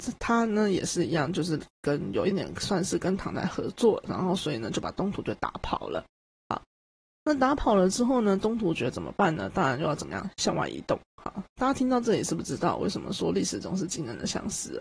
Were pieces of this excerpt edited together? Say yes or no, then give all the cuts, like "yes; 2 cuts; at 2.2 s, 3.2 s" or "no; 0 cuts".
yes; 1 cut; at 2.3 s